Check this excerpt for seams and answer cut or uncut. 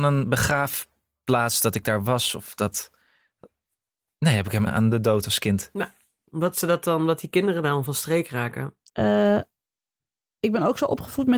cut